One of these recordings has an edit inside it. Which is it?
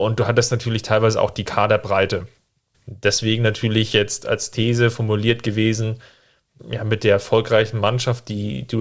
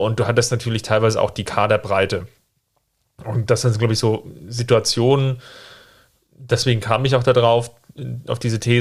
first; 2 cuts; at 2.7 s, 6.6 s

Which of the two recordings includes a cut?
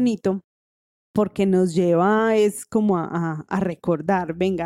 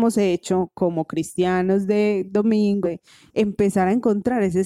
second; 1 cut; at 2.8 s

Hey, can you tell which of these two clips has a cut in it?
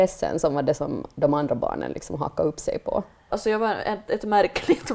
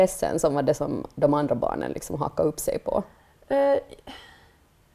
first; 1 cut; at 3.3 s

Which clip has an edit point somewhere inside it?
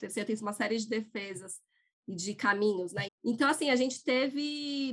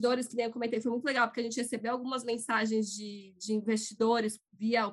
first; 1 cut; at 3.1 s

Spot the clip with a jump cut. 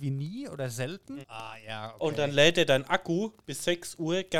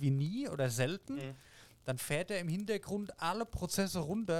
first; 1 cut; at 1.2 s

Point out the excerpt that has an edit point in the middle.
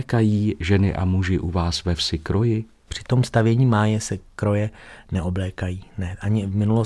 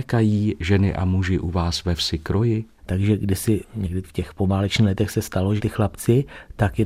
second; 2 cuts; at 2.8 s, 5.6 s

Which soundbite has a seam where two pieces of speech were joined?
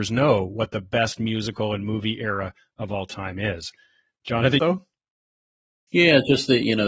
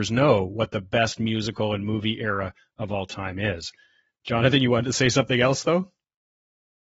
first; 1 cut; at 4.6 s

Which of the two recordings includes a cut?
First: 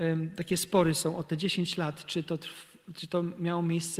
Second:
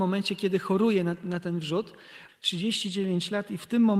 second; 1 cut; at 2.3 s

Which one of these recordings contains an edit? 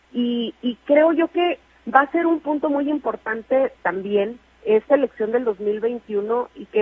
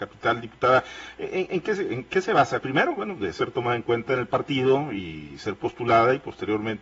second; 1 cut; at 2.6 s

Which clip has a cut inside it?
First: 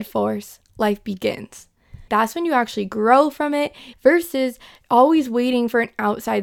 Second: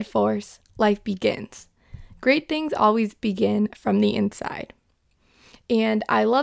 first; 2 cuts; at 2.1 s, 3.9 s

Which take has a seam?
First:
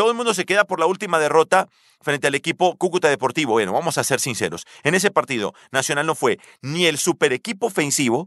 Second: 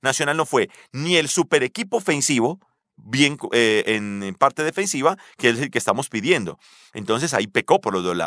second; 1 cut; at 2.9 s

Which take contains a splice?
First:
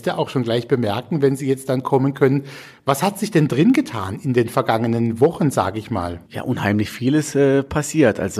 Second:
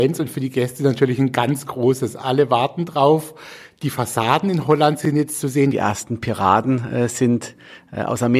second; 1 cut; at 5.7 s

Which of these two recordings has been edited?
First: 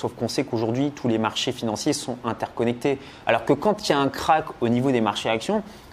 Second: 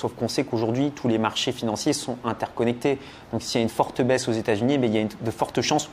first; 1 cut; at 3.2 s

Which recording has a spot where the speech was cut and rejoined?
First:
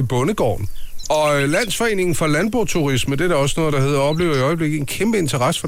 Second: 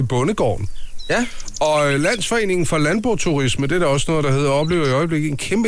first; 1 cut; at 1.0 s

